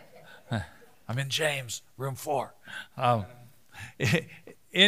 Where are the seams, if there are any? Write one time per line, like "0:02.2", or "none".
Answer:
none